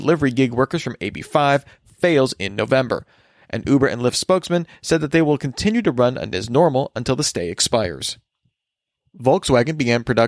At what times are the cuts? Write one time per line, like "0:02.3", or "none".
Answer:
none